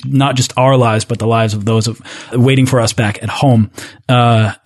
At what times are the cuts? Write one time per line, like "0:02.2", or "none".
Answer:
0:02.3

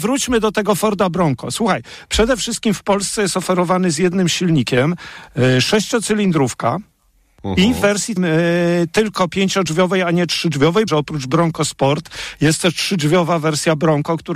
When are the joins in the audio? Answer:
0:08.2
0:10.9

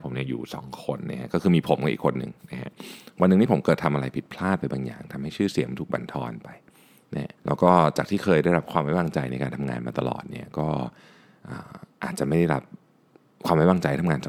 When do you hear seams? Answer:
0:07.4

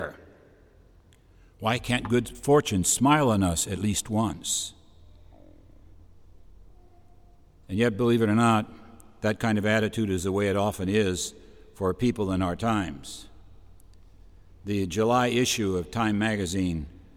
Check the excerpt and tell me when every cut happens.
none

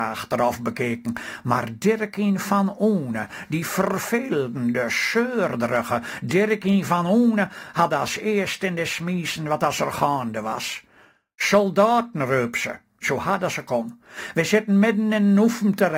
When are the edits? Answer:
none

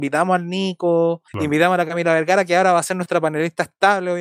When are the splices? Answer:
0:01.3

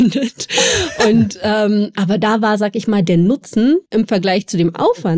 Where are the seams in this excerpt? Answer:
0:03.9

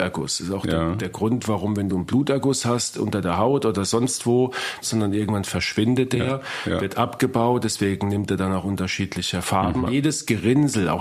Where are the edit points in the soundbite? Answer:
0:04.8
0:09.9

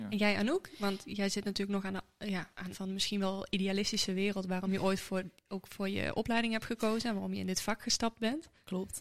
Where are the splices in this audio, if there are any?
0:02.7

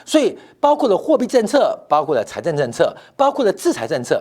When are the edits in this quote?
none

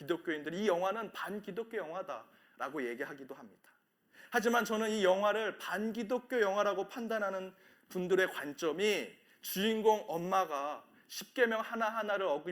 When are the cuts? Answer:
none

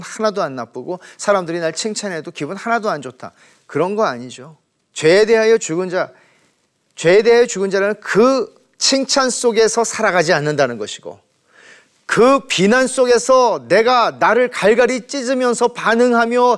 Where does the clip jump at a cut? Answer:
none

